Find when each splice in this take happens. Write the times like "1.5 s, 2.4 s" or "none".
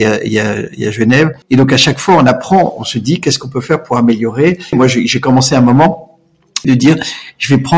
1.4 s, 4.7 s, 6.6 s